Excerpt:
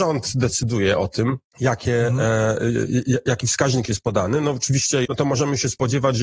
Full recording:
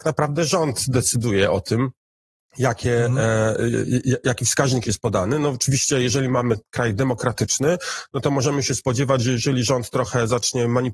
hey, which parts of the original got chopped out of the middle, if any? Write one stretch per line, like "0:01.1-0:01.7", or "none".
0:02.0-0:02.5
0:06.0-0:08.1